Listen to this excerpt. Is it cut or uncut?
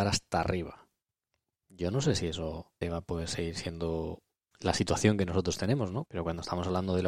cut